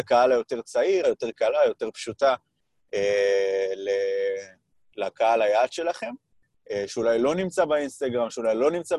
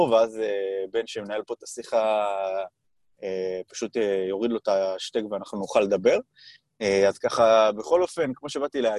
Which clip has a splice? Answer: first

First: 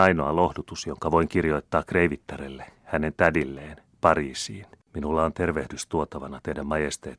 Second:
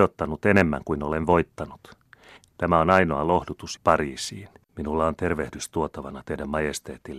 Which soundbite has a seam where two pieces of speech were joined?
second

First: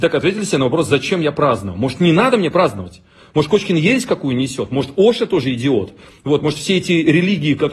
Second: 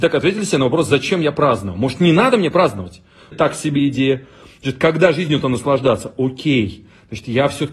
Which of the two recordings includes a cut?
second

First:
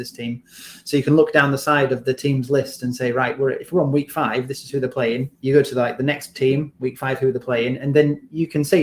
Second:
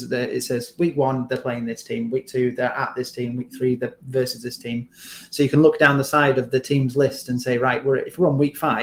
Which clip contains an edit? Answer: first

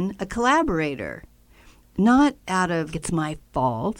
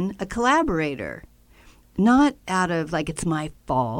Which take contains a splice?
first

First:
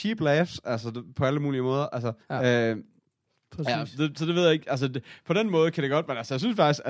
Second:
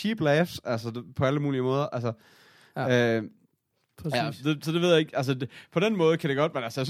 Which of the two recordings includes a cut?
first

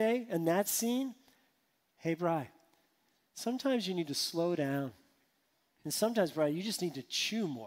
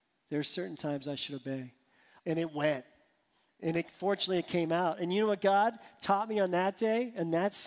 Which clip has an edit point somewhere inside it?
second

